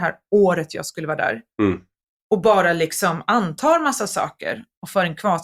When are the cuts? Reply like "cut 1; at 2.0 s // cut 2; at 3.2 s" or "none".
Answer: none